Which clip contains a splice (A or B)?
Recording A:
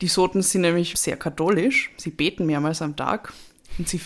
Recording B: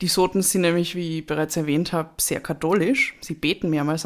A